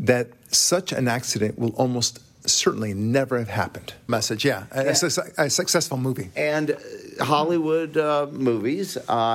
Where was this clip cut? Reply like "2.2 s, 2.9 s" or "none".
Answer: 4.1 s